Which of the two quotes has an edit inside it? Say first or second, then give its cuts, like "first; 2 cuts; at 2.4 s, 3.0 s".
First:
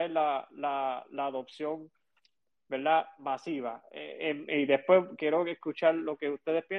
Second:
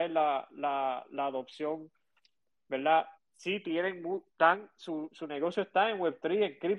second; 2 cuts; at 3.1 s, 4.3 s